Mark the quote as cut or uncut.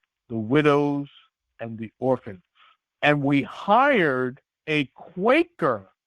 uncut